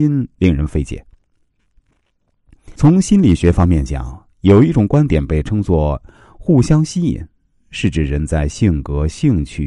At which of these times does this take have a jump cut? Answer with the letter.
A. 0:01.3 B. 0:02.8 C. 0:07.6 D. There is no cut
B